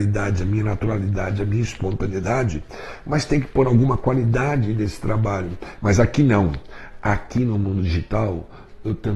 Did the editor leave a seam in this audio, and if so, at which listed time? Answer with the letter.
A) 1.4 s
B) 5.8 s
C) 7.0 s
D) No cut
B